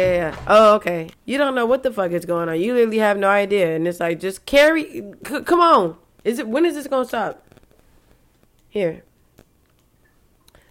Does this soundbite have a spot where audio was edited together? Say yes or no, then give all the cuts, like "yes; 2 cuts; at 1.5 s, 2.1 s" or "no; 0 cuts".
yes; 1 cut; at 1.1 s